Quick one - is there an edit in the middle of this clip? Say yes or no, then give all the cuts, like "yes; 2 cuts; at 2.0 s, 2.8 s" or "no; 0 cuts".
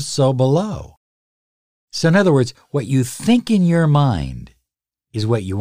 no; 0 cuts